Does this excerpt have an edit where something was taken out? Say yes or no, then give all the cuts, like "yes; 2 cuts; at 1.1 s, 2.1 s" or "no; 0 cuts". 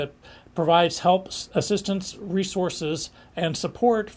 no; 0 cuts